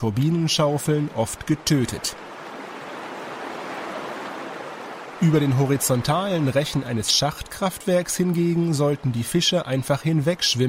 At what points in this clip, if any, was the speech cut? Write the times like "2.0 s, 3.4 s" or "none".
none